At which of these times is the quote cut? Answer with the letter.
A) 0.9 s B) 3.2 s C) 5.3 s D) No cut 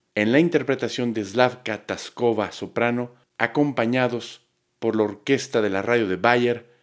B